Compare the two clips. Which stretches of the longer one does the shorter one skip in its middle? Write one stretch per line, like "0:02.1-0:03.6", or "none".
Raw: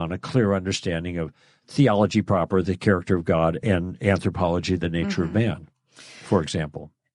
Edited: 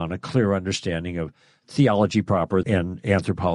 0:02.6-0:03.6